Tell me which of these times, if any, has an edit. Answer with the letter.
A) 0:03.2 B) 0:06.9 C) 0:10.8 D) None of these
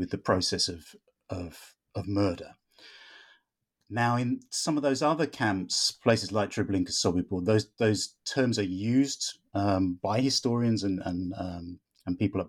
D